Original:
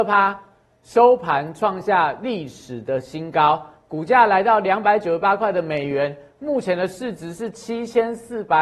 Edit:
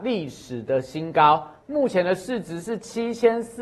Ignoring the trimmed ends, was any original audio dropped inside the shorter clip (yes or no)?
yes